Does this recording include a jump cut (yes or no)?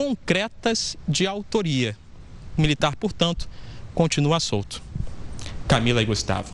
no